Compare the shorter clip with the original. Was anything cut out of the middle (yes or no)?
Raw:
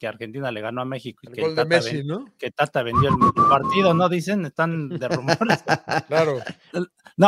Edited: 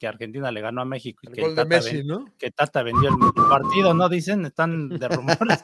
no